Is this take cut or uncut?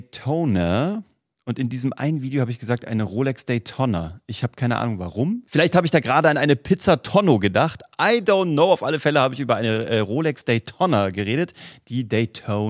uncut